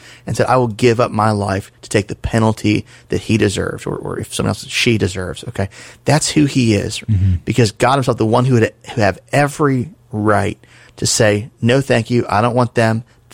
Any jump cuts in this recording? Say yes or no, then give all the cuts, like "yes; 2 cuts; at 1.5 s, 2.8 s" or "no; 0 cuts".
yes; 1 cut; at 7.0 s